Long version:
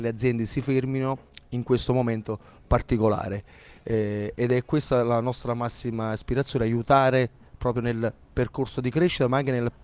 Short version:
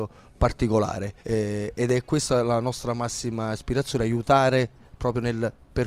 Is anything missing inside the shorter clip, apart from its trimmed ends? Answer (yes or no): yes